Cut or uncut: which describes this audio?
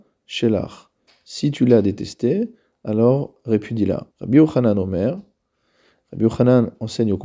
cut